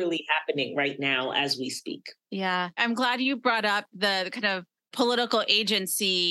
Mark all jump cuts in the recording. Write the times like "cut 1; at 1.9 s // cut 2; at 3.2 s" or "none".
cut 1; at 2.2 s